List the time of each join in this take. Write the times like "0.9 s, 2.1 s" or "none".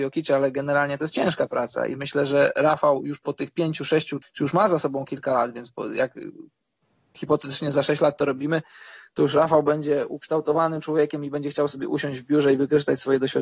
4.2 s